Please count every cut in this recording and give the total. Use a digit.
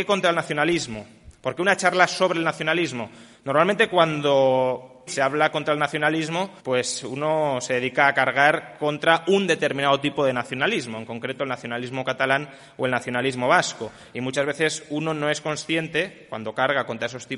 2